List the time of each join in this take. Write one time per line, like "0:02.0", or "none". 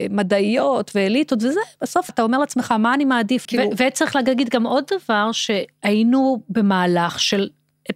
0:02.1
0:03.4